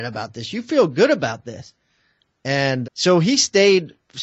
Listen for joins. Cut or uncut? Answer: cut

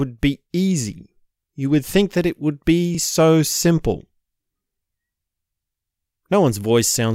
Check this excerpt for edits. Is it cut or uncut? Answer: uncut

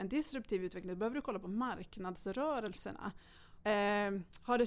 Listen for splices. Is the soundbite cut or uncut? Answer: cut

